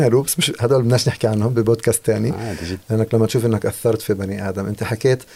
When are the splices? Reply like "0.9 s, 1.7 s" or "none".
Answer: 2.8 s